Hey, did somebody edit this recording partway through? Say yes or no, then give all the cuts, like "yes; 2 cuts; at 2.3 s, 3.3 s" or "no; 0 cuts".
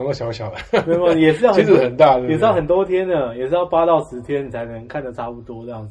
no; 0 cuts